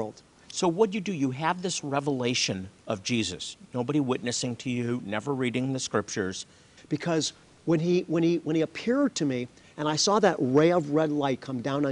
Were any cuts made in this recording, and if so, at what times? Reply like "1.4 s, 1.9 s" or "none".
6.8 s